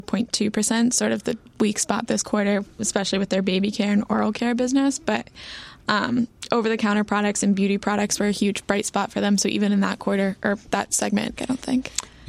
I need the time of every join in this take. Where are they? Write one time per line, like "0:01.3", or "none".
0:11.4

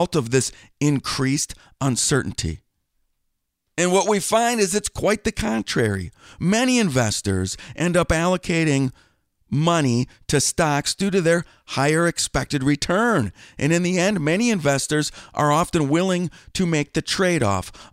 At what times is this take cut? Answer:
none

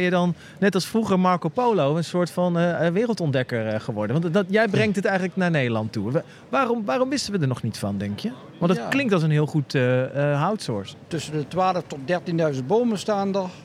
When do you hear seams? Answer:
0:11.1

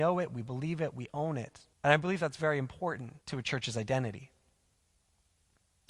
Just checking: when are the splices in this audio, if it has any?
0:01.7
0:03.2

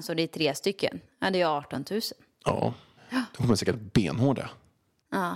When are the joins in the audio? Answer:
0:03.0

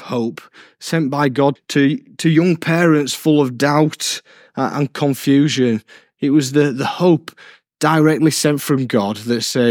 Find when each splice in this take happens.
0:01.6

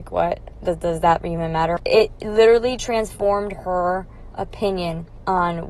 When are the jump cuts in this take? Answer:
0:01.8

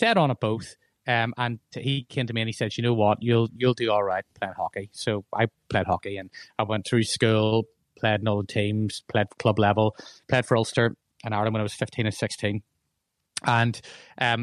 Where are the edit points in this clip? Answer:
none

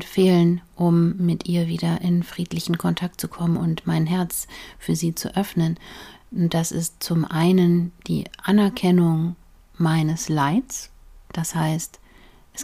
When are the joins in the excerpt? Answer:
none

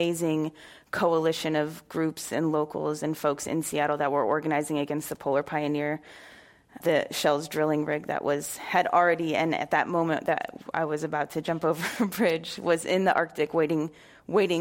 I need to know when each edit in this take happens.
0:06.8

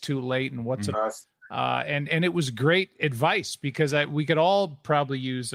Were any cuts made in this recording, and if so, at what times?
0:00.9

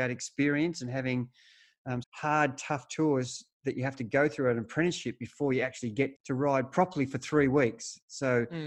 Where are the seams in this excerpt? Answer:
0:02.0
0:06.1

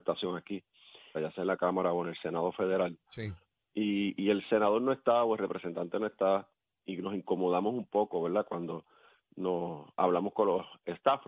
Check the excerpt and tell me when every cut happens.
0:01.1

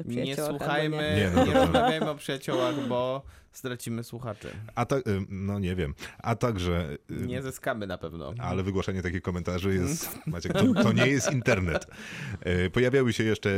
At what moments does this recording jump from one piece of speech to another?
0:10.5

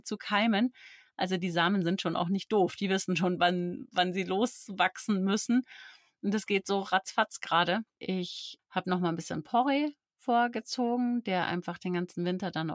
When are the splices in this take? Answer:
none

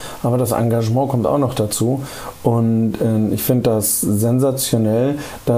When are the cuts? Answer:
none

